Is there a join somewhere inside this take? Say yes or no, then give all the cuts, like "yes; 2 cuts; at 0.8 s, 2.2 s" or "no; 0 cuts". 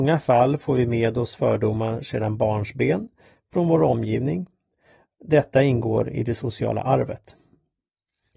no; 0 cuts